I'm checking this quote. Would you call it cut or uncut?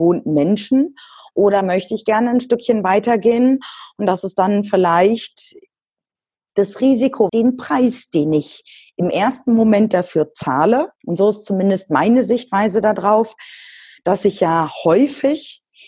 cut